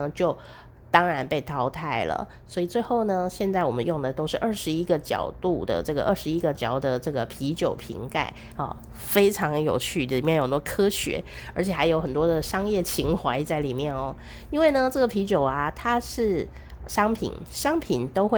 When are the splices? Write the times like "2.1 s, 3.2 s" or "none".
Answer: 6.6 s